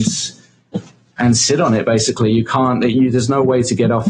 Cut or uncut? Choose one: uncut